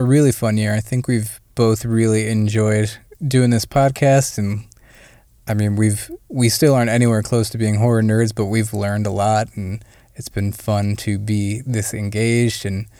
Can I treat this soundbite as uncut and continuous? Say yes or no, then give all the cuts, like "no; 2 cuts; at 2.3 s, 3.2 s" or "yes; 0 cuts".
yes; 0 cuts